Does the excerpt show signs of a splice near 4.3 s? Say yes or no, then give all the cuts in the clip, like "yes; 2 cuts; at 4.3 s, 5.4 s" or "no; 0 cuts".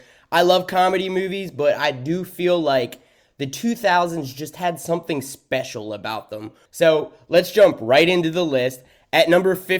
no; 0 cuts